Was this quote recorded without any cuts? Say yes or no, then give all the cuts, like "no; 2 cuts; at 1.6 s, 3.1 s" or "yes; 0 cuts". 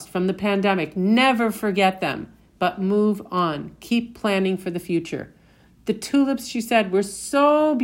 yes; 0 cuts